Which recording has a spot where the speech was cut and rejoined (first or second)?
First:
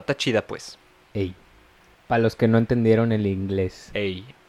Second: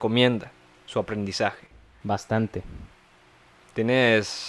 second